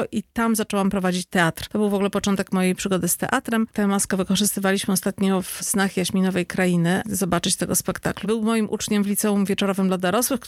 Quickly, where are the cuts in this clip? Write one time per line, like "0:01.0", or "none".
0:03.7
0:07.0
0:08.2